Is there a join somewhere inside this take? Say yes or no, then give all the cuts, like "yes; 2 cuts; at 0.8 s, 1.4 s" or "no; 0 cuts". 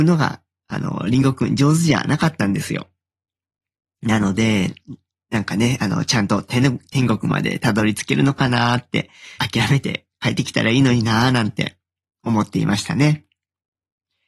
yes; 1 cut; at 9.4 s